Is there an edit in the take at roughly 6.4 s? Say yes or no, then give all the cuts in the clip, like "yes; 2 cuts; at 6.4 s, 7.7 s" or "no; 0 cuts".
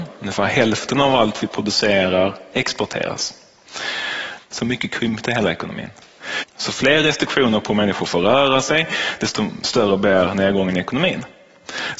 yes; 2 cuts; at 4.4 s, 6.4 s